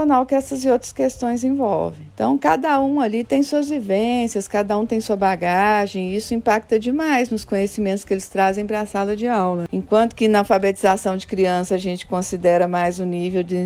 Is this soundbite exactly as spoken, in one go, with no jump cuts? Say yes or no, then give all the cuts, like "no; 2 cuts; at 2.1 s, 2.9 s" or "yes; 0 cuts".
yes; 0 cuts